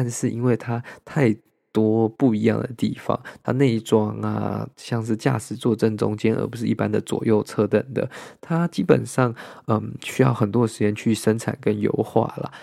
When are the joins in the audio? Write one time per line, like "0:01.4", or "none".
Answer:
0:07.7